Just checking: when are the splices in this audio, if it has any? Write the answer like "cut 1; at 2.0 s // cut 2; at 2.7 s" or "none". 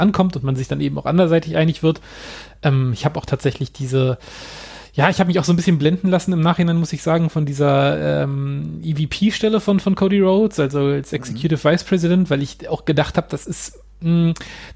none